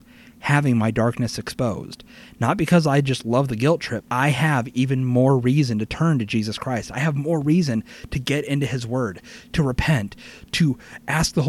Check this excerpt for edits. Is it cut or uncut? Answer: cut